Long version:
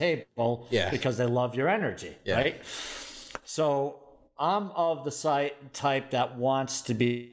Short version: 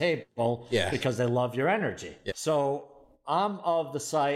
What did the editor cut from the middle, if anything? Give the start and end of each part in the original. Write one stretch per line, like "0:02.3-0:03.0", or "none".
0:02.3-0:03.4